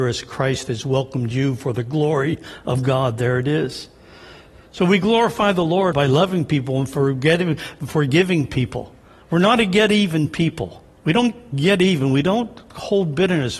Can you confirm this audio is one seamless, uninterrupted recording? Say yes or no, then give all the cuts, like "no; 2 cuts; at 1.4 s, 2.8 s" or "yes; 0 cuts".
no; 2 cuts; at 5.9 s, 10.9 s